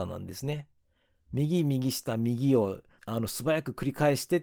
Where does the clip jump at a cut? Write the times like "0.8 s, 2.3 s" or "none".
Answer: 3.0 s